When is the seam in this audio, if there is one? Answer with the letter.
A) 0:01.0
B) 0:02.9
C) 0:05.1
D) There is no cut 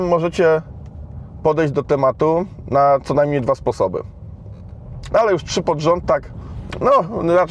C